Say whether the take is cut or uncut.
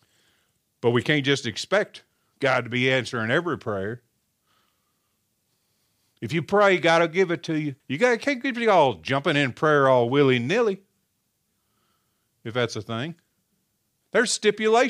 cut